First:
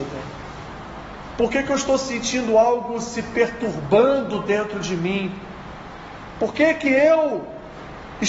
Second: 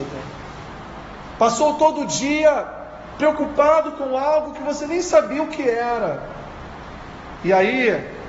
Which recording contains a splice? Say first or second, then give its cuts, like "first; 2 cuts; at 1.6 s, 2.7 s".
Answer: second; 1 cut; at 1.4 s